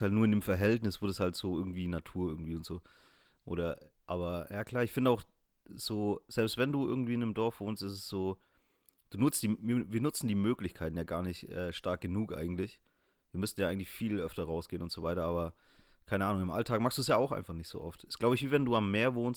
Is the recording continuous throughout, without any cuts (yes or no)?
yes